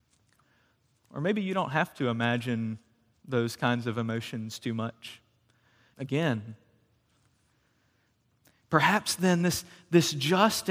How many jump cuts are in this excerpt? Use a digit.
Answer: 1